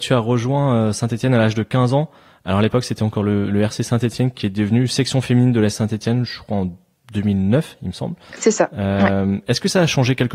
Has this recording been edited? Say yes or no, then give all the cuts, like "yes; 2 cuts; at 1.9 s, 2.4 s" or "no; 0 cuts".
no; 0 cuts